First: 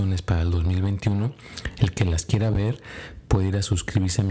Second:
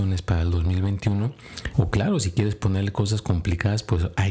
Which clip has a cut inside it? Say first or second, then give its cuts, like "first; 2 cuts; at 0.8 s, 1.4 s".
second; 1 cut; at 1.7 s